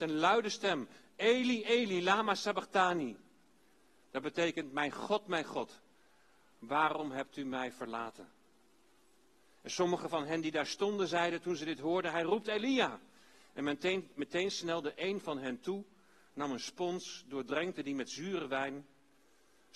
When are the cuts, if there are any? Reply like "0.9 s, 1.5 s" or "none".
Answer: none